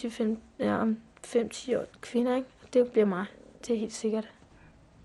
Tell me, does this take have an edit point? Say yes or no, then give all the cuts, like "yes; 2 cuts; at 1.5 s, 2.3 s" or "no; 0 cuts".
yes; 1 cut; at 1.9 s